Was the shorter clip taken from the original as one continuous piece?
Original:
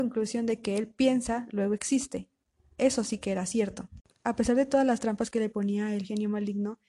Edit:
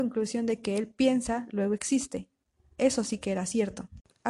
yes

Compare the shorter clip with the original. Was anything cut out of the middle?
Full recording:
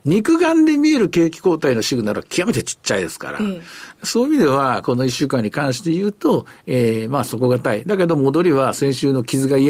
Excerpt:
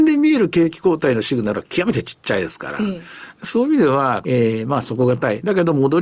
yes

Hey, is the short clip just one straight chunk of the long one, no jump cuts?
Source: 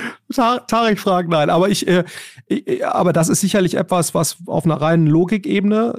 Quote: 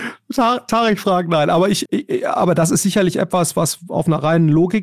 no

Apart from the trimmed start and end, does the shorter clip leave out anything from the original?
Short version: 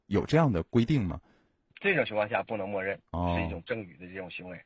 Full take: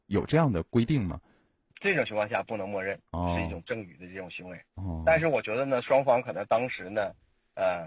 no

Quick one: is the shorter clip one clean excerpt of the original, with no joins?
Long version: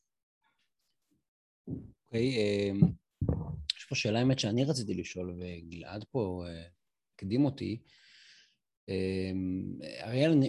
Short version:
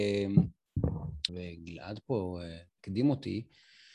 no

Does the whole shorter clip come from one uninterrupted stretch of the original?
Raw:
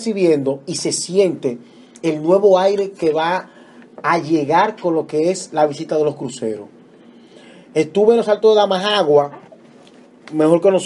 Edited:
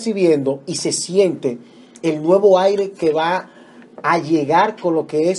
yes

